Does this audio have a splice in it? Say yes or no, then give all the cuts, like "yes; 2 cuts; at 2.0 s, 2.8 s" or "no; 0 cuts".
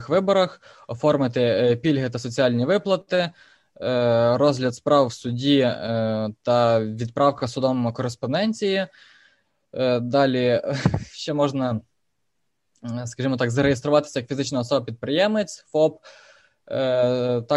no; 0 cuts